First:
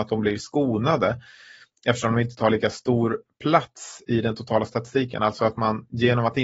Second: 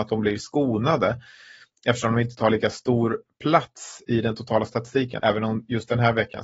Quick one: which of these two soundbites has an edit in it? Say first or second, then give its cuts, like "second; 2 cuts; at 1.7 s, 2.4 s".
second; 1 cut; at 5.2 s